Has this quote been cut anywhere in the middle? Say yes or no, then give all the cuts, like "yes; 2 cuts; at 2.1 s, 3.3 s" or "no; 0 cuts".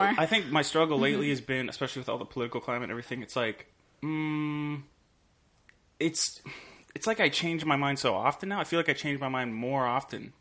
no; 0 cuts